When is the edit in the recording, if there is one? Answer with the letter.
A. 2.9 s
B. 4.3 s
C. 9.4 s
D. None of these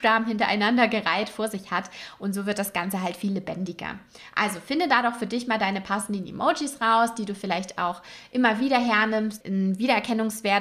C